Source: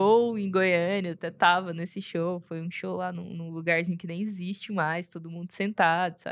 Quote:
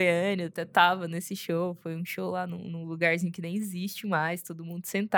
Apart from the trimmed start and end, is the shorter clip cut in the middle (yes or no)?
no